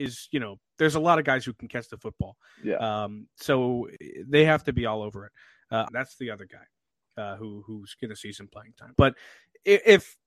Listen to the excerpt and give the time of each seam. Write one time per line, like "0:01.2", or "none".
0:05.9
0:09.0